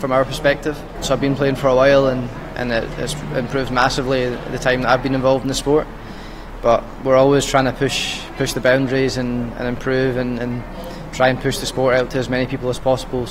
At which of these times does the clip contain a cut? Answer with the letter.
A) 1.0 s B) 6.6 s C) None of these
A